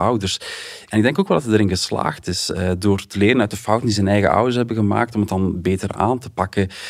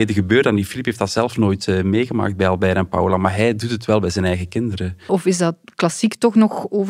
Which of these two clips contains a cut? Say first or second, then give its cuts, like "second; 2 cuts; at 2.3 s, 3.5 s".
second; 1 cut; at 5.1 s